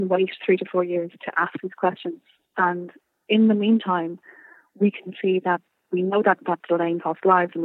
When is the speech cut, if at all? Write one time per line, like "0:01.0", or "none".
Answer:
none